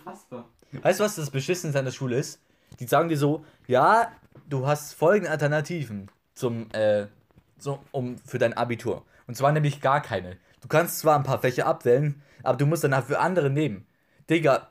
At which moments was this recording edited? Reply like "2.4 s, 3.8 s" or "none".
none

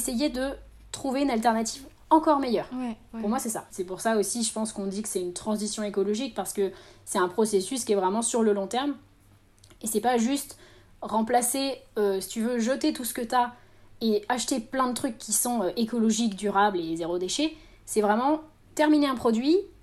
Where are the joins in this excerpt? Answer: 3.7 s

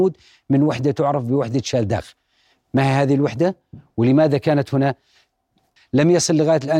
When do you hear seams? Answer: 5.8 s

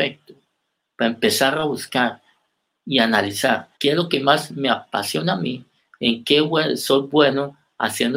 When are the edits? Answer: 3.8 s

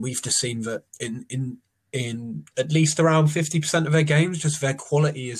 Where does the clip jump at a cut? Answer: none

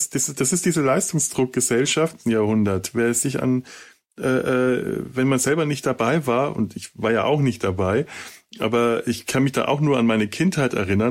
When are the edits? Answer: 2.2 s

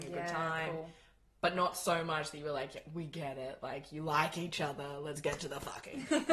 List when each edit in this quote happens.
none

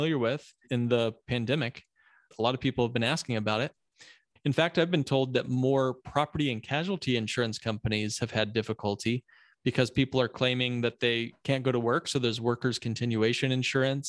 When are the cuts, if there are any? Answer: 4.3 s

